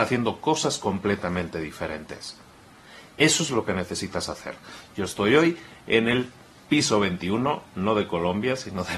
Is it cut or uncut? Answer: uncut